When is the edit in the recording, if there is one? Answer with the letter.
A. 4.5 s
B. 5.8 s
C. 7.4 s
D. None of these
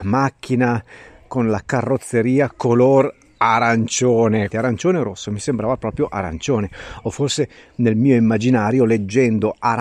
A